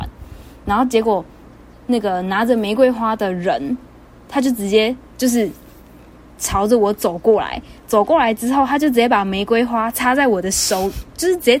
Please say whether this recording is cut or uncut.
uncut